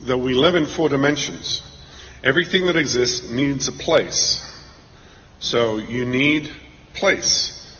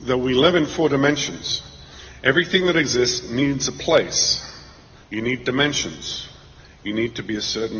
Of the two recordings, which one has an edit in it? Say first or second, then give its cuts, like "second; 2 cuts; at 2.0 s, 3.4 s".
second; 1 cut; at 5.0 s